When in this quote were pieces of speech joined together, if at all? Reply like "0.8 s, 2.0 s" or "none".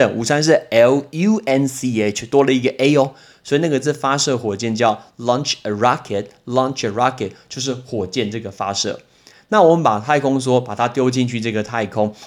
none